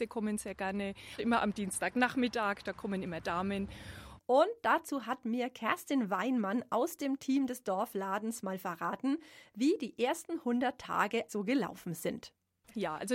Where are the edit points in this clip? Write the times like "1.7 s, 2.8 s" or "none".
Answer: 1.2 s, 4.2 s, 11.3 s